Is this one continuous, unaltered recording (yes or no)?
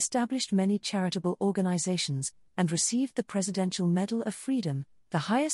yes